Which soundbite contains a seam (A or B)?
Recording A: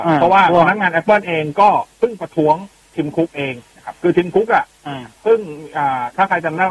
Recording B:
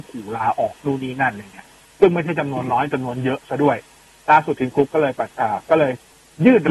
A